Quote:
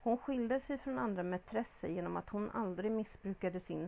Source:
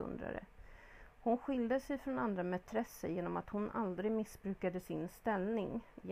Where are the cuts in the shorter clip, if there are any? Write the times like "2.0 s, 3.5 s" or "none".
none